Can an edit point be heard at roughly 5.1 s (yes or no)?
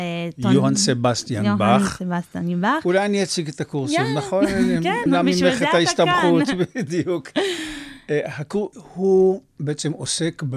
yes